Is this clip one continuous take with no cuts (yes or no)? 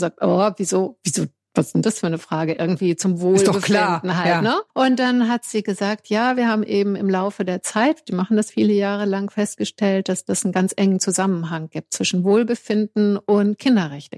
no